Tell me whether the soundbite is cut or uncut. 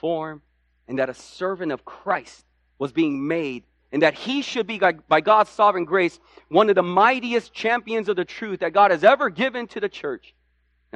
uncut